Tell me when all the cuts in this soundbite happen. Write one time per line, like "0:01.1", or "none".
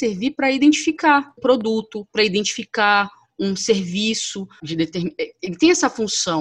0:01.4
0:04.6

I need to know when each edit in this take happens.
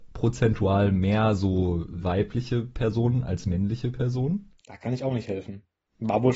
none

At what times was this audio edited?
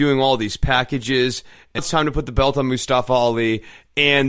0:01.8

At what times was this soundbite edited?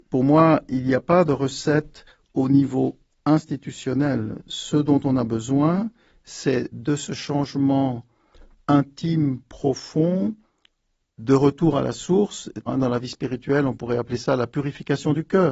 0:12.7

